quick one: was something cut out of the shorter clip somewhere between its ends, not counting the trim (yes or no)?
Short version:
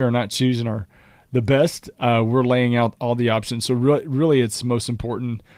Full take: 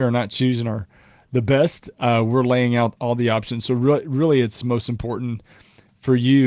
no